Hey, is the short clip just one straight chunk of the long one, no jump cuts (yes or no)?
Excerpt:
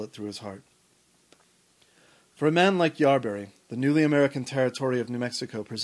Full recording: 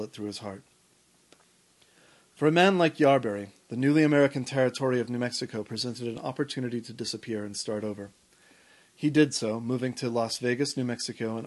yes